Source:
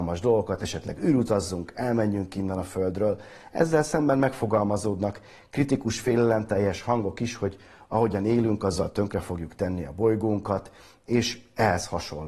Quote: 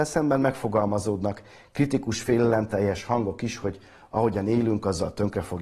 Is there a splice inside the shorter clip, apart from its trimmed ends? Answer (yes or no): no